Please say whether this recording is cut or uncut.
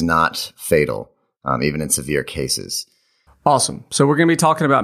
cut